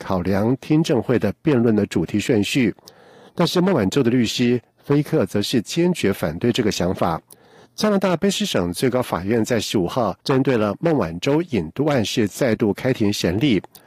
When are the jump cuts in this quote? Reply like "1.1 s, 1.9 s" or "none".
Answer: 7.7 s, 10.2 s